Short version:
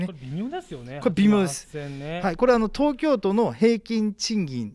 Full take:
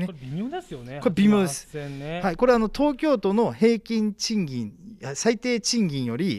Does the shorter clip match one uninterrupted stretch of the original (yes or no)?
yes